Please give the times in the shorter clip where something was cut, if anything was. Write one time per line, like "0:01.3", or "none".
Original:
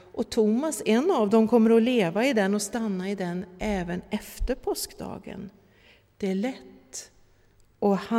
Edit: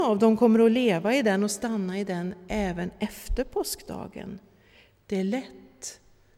none

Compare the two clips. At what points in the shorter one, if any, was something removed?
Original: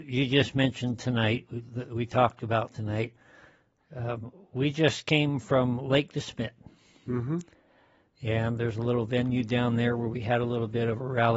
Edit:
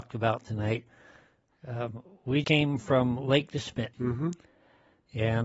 0:02.4
0:03.9

